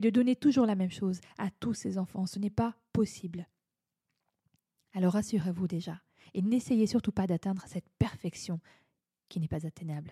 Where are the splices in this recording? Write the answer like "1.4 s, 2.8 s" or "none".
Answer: none